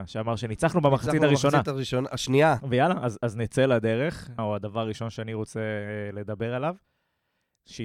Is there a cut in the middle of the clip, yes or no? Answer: yes